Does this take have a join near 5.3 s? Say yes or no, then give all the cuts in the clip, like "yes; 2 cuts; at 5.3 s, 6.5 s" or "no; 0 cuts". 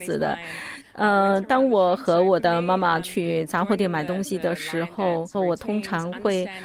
yes; 1 cut; at 5.3 s